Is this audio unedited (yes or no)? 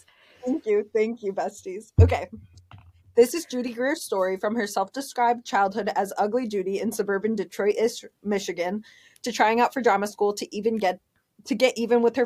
yes